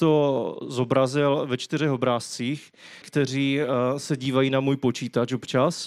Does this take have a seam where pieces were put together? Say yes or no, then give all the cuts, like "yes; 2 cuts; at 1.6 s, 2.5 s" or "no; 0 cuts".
yes; 1 cut; at 3.0 s